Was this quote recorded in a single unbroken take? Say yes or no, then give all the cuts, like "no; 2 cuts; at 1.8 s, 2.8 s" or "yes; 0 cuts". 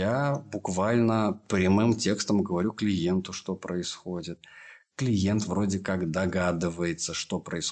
yes; 0 cuts